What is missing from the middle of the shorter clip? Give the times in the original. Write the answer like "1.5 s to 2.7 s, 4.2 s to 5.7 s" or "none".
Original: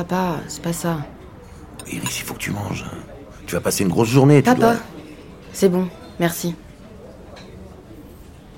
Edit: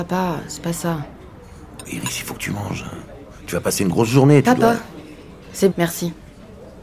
5.7 s to 6.1 s